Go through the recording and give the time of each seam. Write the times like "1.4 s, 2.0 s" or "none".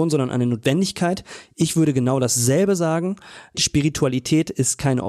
none